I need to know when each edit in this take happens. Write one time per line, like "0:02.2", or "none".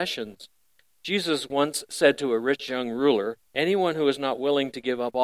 0:03.5